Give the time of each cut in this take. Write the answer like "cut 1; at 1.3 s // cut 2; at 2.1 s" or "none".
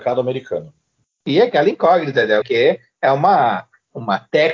cut 1; at 2.4 s

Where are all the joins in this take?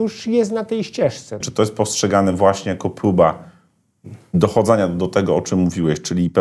cut 1; at 1.4 s

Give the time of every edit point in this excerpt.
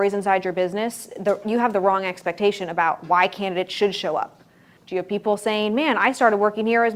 cut 1; at 4.8 s

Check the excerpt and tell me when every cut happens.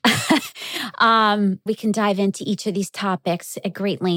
cut 1; at 1.7 s

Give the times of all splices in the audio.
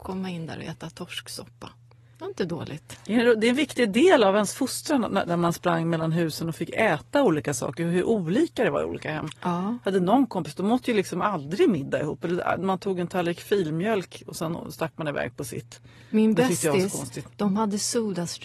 cut 1; at 5.3 s

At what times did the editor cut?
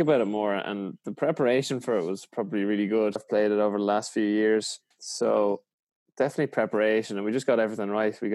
cut 1; at 3.2 s // cut 2; at 4.9 s

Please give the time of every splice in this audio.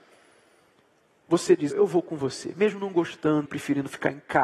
cut 1; at 1.7 s // cut 2; at 3.5 s

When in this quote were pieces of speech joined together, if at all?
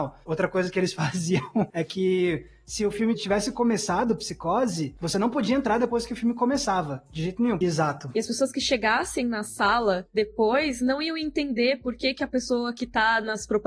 cut 1; at 7.6 s

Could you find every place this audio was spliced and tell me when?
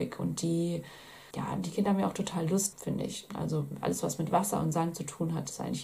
cut 1; at 1.3 s // cut 2; at 2.7 s

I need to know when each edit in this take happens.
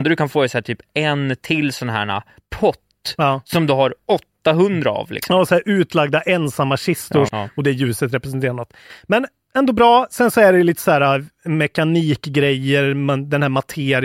cut 1; at 7.3 s

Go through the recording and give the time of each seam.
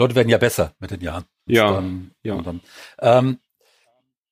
cut 1; at 1.5 s

